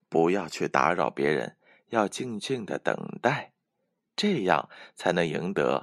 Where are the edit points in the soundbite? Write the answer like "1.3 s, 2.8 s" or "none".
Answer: none